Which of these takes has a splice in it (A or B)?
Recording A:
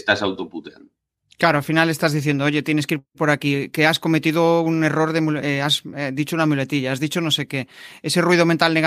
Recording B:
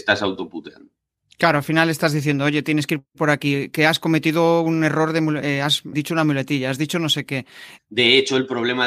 B